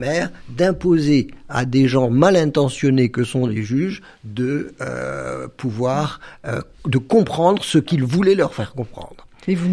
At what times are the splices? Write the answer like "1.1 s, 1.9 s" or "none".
none